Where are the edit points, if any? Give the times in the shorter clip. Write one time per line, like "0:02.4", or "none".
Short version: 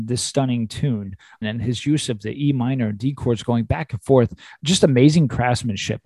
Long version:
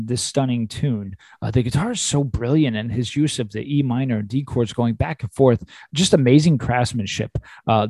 0:01.4